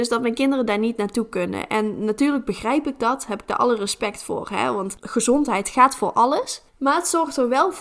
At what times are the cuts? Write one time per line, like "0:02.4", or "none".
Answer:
0:06.7

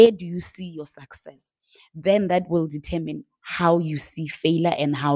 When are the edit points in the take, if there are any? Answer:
none

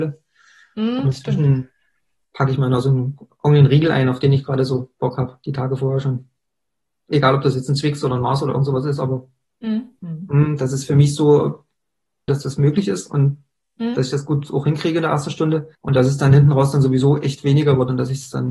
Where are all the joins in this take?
0:10.0
0:12.3
0:15.8

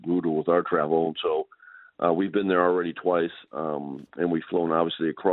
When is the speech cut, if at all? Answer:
none

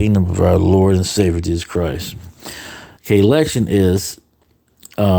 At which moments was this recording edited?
0:03.0

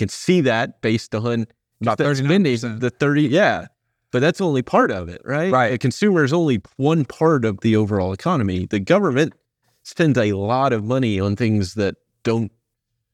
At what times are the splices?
none

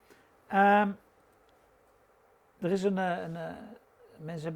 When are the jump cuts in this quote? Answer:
none

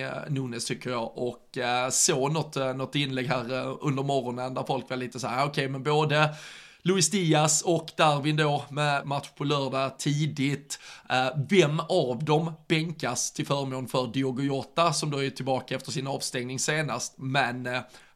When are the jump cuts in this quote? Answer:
0:09.0

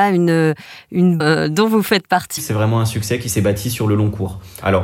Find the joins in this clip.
0:01.2
0:02.4

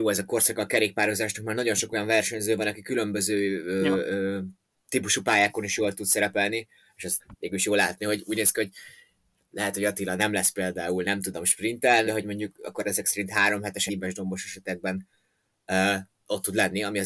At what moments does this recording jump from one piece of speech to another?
0:12.0
0:13.9

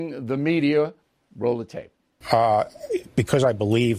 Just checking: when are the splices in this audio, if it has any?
0:02.2

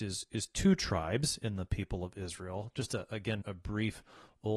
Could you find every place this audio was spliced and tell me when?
0:03.4

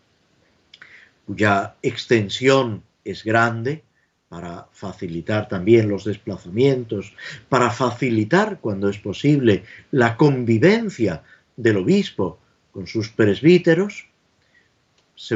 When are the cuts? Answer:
0:02.9

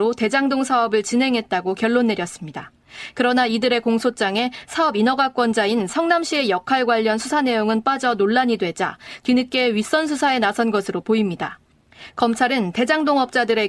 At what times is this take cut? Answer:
none

